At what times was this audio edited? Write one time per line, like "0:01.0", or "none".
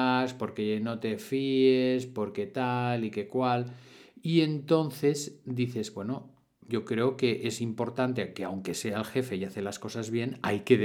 0:06.7